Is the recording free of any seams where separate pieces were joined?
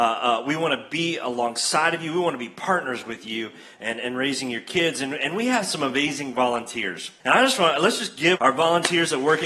no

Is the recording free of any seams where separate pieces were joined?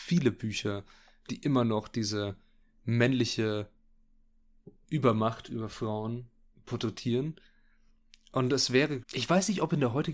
no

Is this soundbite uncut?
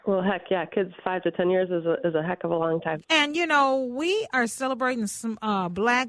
no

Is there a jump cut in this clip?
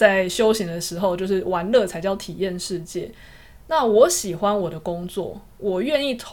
no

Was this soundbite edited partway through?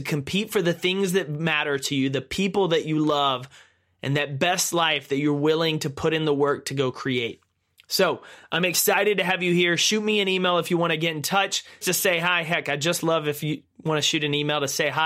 yes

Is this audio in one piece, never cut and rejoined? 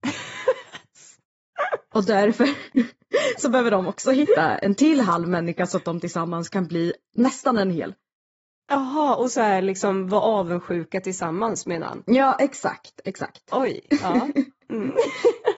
yes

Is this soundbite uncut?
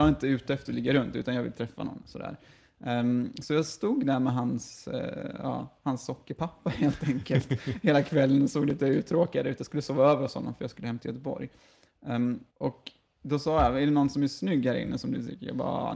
no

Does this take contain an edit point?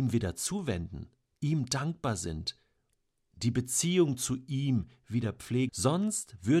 yes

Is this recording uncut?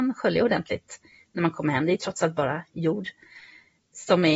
yes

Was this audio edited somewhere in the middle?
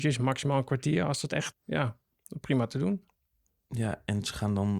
yes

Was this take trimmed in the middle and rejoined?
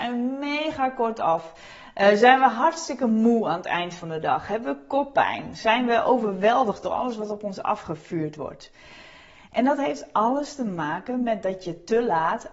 no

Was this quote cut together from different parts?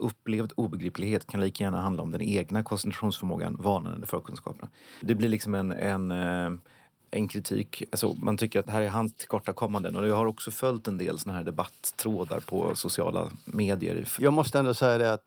no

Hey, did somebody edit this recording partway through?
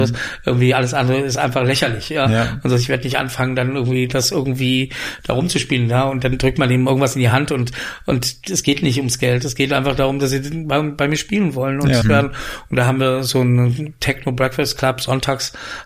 yes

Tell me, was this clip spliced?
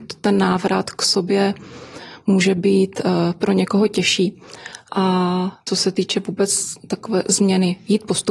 yes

